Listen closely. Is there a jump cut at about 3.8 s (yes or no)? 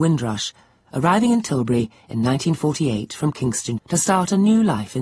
yes